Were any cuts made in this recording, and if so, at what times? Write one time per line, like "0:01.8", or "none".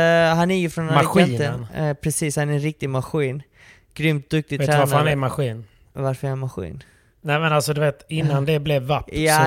none